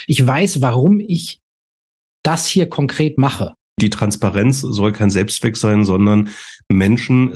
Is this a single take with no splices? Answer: yes; 0 cuts

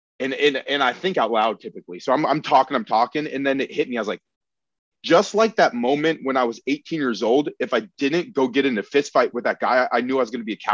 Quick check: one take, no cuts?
yes; 0 cuts

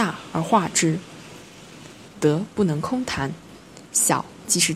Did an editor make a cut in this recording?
yes; 1 cut; at 2.1 s

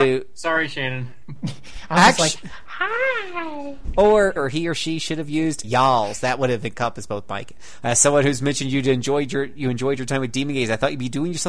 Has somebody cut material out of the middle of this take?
yes; 3 cuts; at 4.4 s, 5.6 s, 7.8 s

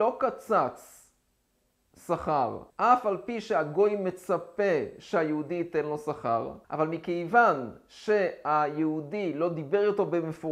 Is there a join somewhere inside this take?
yes; 2 cuts; at 2.7 s, 6.6 s

